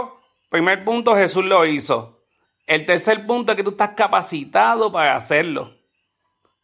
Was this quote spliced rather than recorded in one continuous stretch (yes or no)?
yes